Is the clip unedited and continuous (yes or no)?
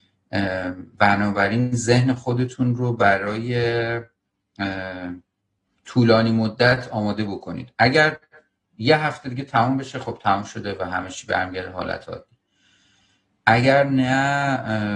no